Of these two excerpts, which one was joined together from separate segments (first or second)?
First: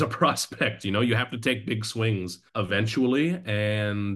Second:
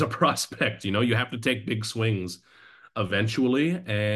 first